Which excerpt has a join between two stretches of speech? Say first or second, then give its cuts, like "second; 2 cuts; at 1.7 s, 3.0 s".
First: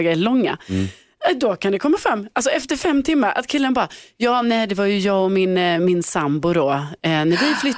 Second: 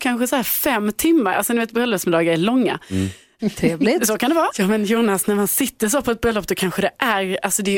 second; 2 cuts; at 3.4 s, 4.5 s